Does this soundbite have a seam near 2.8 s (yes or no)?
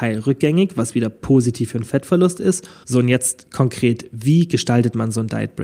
yes